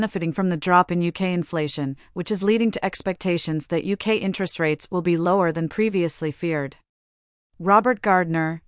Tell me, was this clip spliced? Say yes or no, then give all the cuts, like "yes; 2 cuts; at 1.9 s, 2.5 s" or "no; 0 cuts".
yes; 1 cut; at 7.4 s